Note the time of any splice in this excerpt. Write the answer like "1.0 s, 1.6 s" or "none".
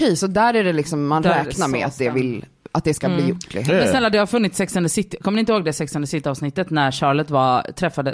none